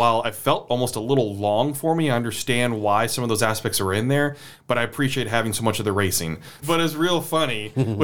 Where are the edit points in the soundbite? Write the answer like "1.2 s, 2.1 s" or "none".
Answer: 6.6 s